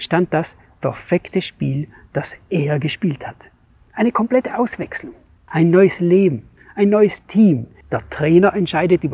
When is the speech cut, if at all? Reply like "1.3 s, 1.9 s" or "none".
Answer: 5.5 s, 7.8 s